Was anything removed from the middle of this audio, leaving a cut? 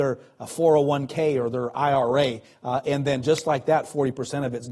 no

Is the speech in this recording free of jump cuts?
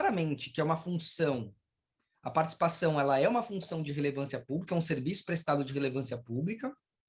yes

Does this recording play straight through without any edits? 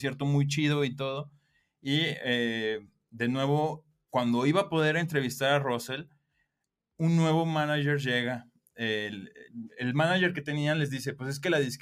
yes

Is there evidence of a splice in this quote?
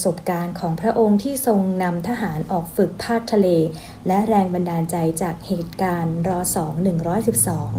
no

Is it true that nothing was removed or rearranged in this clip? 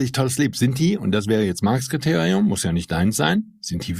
yes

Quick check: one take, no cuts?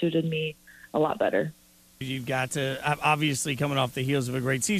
no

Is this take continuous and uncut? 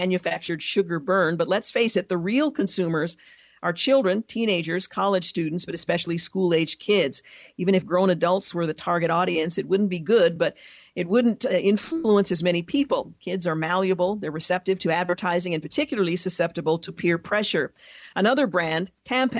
yes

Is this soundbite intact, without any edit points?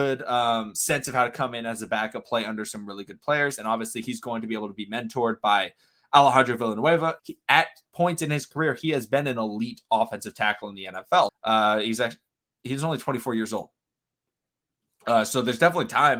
no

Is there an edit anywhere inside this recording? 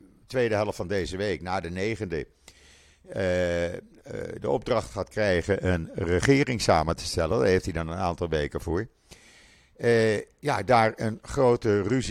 no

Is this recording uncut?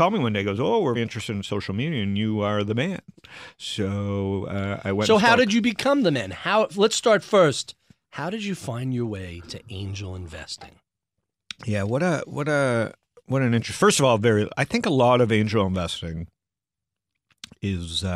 no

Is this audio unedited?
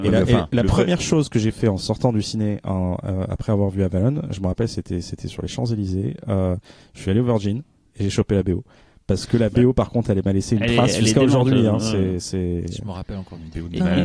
yes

